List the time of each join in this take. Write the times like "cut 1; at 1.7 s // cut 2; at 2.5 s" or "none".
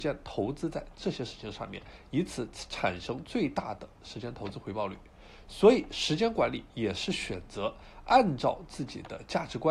none